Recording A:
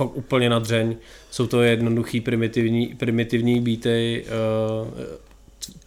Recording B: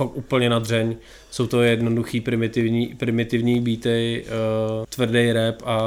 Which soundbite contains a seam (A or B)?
B